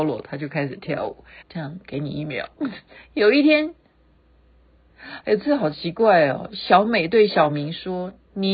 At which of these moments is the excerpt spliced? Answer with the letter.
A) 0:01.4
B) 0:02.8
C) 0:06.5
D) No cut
A